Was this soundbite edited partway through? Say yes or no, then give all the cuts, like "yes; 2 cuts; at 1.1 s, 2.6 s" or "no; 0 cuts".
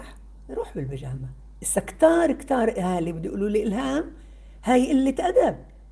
no; 0 cuts